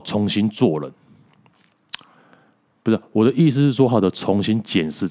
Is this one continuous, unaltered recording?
no; 1 cut; at 3.9 s

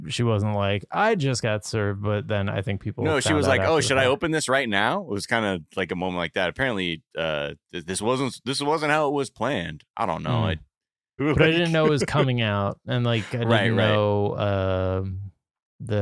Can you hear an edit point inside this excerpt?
yes; 1 cut; at 11.2 s

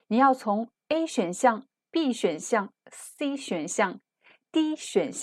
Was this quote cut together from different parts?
no; 0 cuts

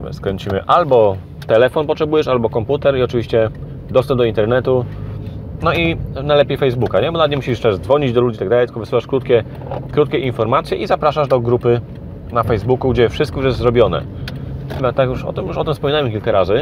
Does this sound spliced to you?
yes; 1 cut; at 14.8 s

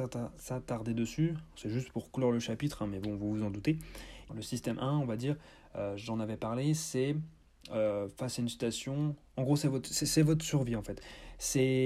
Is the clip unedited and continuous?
no; 1 cut; at 4.3 s

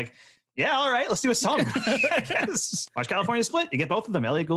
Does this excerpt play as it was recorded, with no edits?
no; 1 cut; at 2.9 s

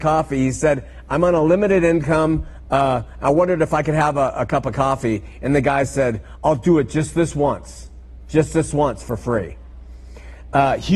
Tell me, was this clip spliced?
no; 0 cuts

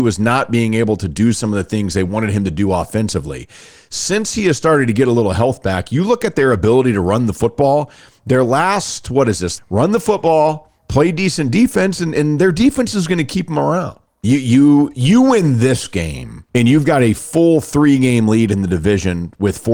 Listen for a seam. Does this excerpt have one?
yes; 3 cuts; at 9.6 s, 14.2 s, 16.5 s

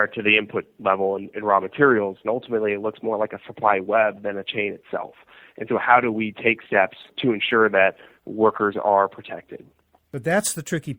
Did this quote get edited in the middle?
yes; 1 cut; at 2.2 s

